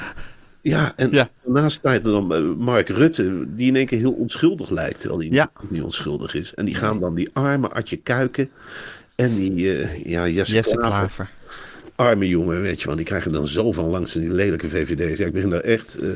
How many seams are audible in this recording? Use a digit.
0